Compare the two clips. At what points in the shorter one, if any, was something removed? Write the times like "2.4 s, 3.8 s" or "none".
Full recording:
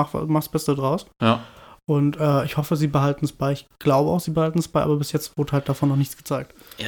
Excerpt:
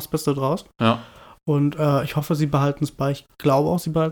none